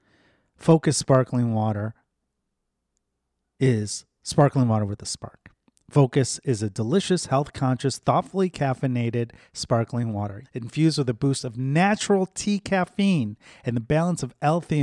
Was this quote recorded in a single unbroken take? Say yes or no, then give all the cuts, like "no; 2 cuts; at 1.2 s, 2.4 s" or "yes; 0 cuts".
no; 1 cut; at 10.4 s